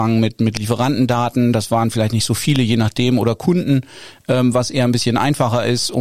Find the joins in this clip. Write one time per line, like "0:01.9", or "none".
none